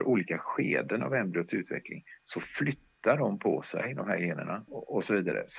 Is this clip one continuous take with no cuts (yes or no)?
no